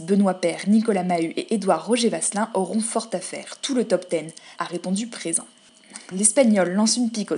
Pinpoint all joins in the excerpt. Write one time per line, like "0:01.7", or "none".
0:04.6
0:06.1